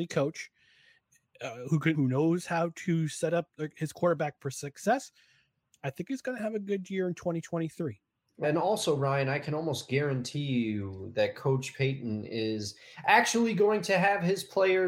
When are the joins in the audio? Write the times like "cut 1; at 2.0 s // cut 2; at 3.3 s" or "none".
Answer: cut 1; at 1.9 s // cut 2; at 8.4 s